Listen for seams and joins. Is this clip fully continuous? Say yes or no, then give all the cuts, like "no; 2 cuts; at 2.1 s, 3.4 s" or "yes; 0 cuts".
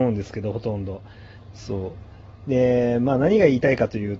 no; 1 cut; at 1.4 s